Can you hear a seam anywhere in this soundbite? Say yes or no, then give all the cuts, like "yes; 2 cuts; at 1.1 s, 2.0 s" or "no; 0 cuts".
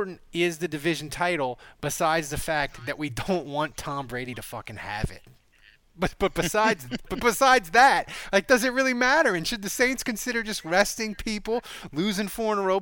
no; 0 cuts